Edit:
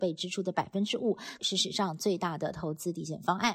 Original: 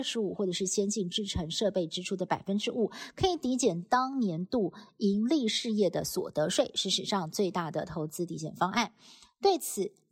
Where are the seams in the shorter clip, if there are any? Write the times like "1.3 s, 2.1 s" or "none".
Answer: 1.4 s